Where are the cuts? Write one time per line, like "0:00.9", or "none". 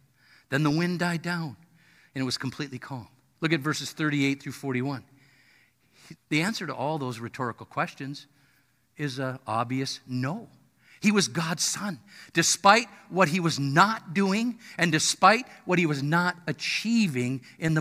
0:03.4
0:06.2